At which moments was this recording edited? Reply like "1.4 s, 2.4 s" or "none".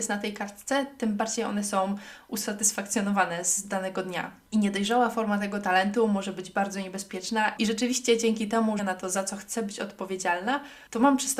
7.6 s, 8.8 s